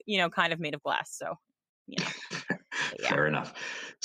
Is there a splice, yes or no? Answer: no